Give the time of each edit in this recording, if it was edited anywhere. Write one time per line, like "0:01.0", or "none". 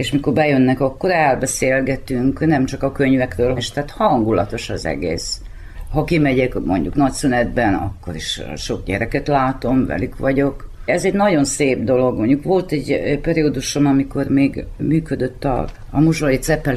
0:03.6